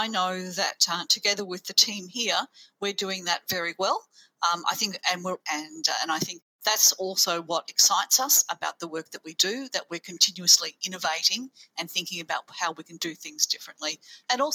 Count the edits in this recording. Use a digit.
1